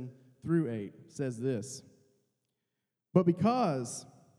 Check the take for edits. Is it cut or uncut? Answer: uncut